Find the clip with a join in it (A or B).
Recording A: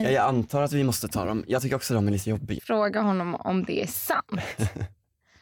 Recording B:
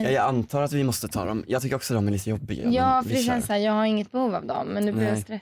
A